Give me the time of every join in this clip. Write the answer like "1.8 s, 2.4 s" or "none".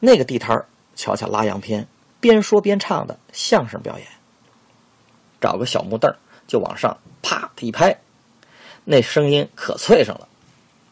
2.1 s, 5.2 s